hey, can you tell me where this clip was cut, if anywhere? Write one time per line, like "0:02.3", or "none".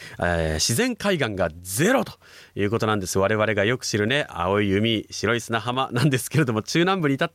none